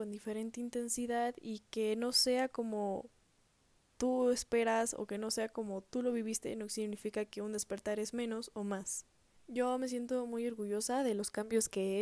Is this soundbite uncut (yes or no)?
yes